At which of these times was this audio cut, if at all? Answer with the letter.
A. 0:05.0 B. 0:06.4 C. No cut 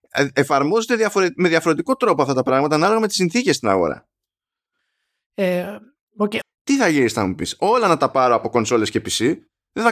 B